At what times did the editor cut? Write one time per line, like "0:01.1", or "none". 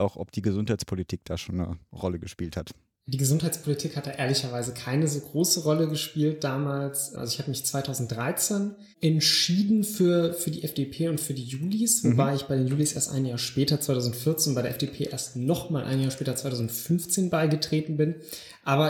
0:08.9